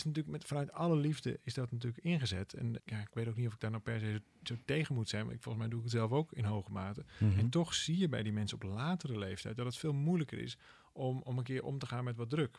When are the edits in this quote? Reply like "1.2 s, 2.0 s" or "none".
2.8 s